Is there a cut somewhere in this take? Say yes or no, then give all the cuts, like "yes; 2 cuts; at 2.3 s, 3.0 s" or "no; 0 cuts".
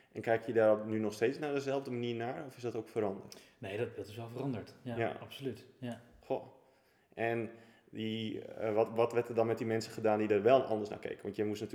no; 0 cuts